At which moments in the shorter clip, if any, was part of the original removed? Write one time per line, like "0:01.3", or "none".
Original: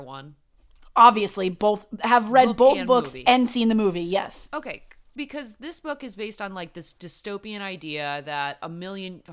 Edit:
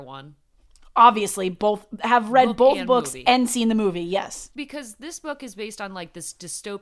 0:04.5